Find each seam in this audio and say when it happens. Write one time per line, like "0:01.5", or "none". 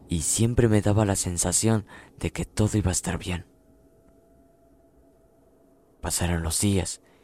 none